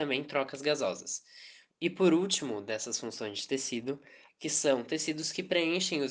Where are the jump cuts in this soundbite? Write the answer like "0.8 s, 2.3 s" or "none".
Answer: 1.7 s, 4.3 s